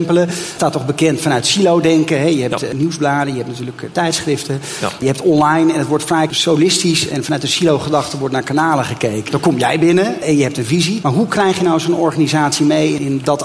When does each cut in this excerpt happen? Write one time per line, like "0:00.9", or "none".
0:09.3
0:11.0